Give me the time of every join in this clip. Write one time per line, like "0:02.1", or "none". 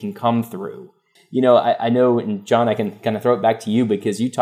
0:01.2